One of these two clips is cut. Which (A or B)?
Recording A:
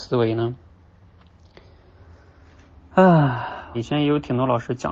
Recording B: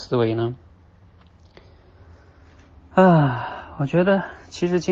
A